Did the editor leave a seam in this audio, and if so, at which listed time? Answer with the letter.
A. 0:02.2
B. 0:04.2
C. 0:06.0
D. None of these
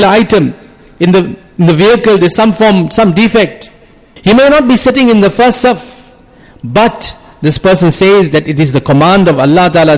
B